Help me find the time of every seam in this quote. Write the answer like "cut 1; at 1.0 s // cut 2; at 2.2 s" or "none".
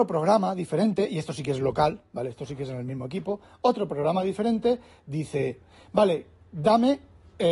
none